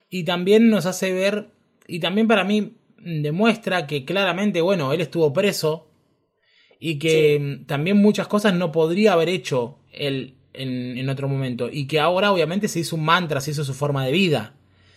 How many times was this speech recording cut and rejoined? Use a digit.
0